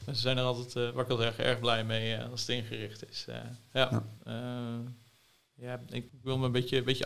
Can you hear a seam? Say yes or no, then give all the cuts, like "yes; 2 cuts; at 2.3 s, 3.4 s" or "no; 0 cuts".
yes; 2 cuts; at 4.2 s, 6.1 s